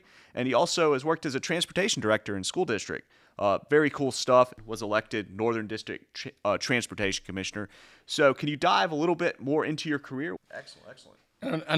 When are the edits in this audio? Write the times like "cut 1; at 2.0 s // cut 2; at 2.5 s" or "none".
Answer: cut 1; at 10.4 s